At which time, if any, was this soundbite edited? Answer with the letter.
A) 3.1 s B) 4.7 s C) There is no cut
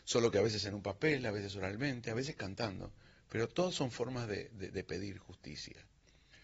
B